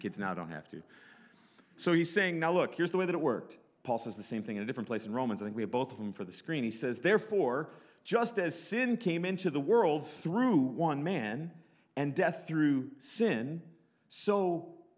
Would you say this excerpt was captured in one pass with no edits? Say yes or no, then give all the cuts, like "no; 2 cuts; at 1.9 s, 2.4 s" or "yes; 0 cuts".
no; 1 cut; at 3.8 s